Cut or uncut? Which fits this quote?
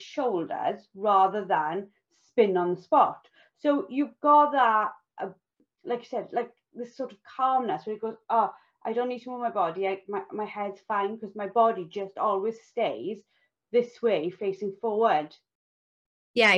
uncut